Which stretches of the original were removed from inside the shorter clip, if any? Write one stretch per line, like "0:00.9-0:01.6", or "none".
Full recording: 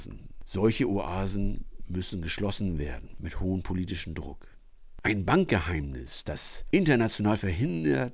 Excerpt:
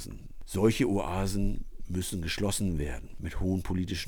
none